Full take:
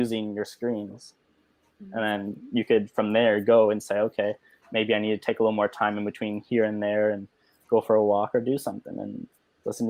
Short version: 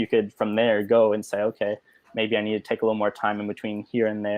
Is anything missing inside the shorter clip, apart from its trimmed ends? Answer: no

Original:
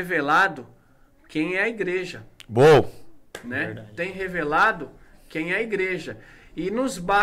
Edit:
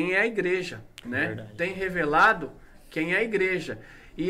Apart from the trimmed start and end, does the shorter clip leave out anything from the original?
yes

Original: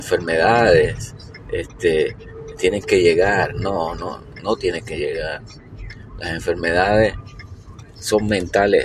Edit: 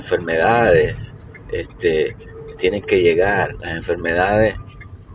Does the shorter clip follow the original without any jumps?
no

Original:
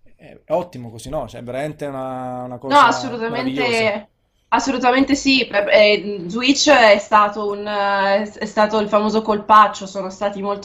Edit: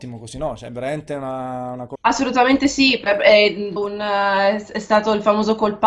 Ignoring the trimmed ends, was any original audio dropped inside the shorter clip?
yes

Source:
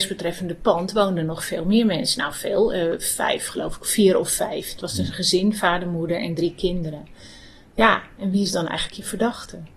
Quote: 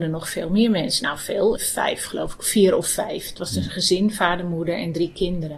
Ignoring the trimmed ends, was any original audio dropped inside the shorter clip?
yes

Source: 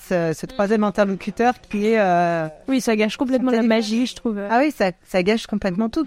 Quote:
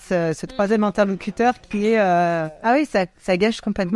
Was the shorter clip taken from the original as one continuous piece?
no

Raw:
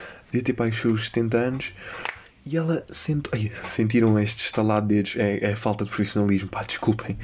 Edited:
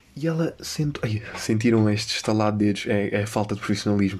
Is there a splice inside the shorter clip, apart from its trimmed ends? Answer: no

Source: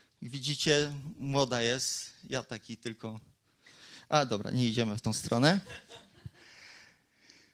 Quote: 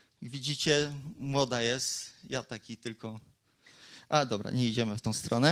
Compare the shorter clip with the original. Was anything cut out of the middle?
no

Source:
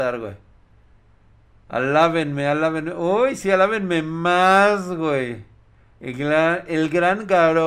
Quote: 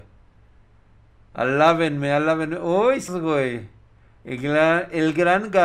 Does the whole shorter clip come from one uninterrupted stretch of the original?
no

